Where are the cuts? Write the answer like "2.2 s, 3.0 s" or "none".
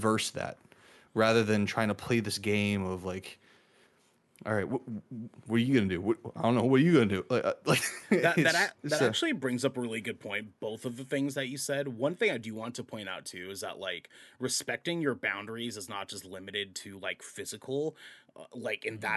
none

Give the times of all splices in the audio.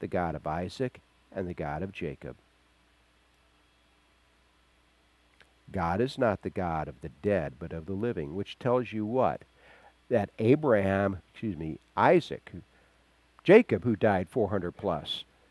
11.2 s

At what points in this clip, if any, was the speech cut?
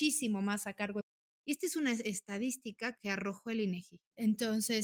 1.3 s

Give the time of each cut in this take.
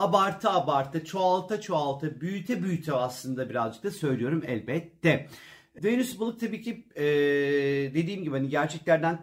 5.8 s

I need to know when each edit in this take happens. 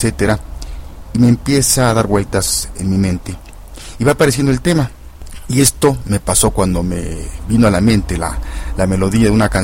none

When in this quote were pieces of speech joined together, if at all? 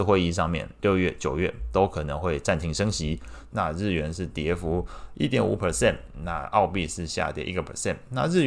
1.2 s, 3.5 s

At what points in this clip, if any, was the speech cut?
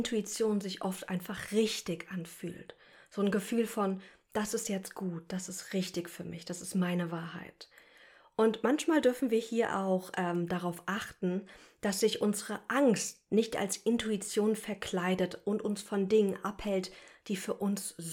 none

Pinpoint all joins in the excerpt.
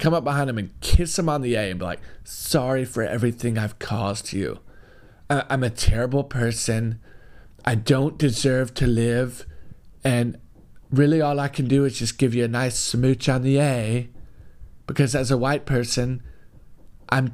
none

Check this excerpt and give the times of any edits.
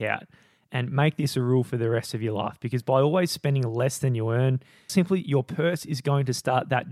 4.9 s

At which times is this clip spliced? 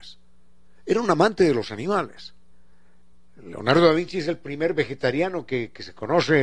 none

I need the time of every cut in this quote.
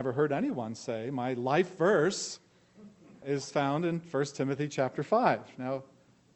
3.2 s

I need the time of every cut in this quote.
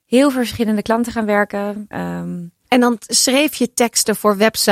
1.9 s

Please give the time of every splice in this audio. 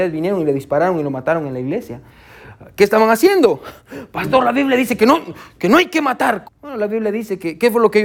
6.4 s

